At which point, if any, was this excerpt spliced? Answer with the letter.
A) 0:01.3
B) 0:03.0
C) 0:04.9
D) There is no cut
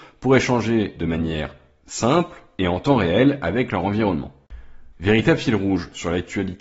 C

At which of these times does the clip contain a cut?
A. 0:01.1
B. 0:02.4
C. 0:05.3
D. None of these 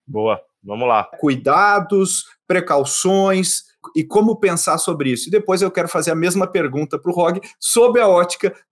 A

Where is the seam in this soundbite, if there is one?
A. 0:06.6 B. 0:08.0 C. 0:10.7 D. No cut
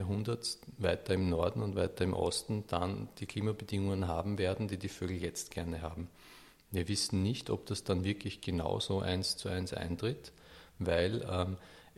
D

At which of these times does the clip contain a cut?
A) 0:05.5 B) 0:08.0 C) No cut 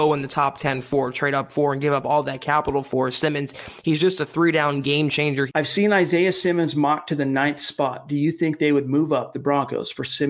A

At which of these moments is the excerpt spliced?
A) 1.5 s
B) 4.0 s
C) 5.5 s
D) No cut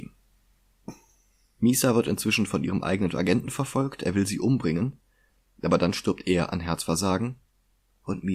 D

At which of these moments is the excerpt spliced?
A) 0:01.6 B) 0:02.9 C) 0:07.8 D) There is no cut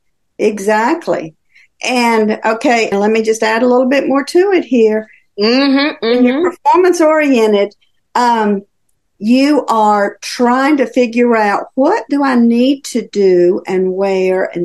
B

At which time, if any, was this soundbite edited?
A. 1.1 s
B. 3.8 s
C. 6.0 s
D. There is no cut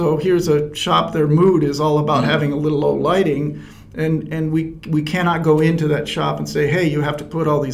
D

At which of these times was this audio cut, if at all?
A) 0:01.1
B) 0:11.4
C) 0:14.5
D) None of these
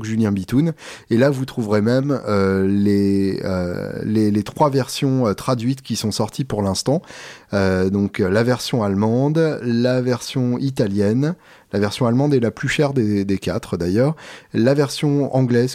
D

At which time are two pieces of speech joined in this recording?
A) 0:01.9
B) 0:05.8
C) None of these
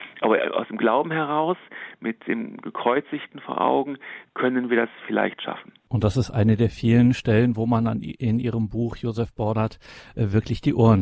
B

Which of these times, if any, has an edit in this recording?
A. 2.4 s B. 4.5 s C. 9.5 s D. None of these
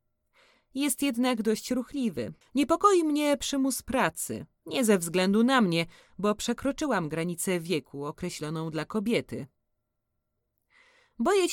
A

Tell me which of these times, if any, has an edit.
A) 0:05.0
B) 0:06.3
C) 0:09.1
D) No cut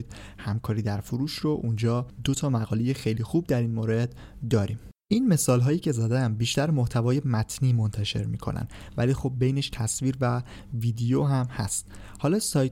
A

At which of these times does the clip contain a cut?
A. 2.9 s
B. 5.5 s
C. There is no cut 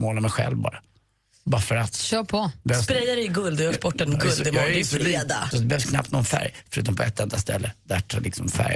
B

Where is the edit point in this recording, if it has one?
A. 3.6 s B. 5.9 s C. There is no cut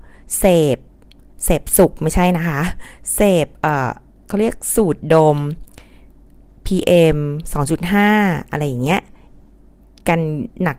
C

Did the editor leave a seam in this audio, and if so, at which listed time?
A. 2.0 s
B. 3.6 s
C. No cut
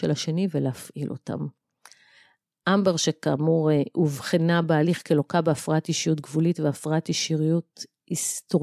C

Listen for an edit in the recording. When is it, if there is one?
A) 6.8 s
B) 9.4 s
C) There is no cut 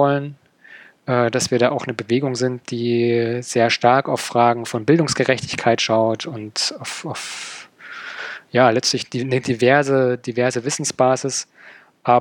C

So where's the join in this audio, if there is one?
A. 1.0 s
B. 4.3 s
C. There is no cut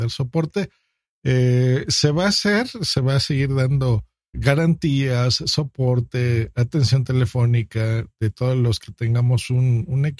B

